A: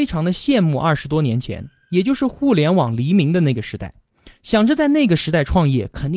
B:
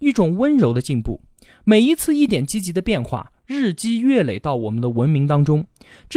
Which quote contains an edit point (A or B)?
B